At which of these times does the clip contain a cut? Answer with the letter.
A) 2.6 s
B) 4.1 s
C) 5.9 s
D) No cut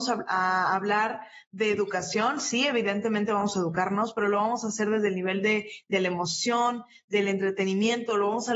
D